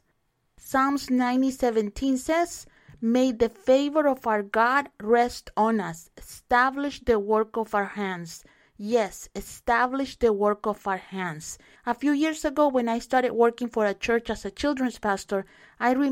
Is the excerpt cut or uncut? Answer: cut